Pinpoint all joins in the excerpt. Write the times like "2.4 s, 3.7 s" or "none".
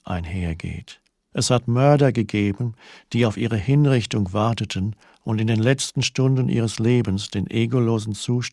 1.3 s

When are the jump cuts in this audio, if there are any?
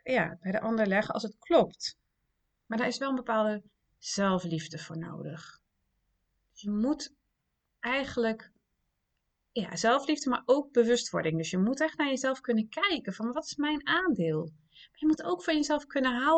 none

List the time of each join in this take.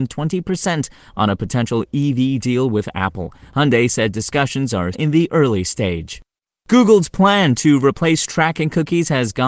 4.9 s

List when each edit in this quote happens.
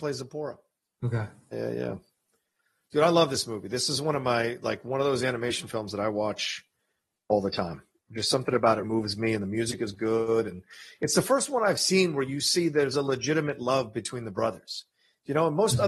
1.5 s, 8.8 s

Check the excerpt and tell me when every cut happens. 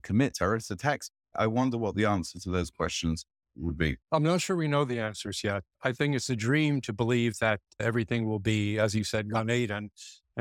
1.3 s, 4.0 s

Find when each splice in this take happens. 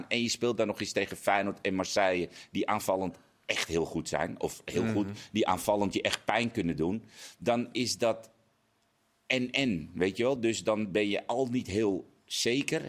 none

